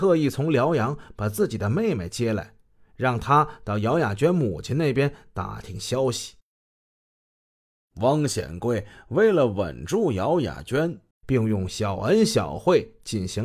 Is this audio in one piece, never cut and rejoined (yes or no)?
no